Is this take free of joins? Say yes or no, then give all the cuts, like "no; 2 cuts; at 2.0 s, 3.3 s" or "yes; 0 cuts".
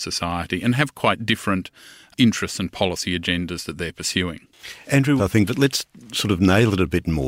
no; 1 cut; at 5.2 s